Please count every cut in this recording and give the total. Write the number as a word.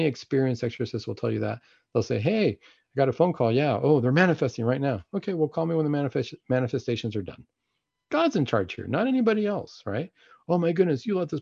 zero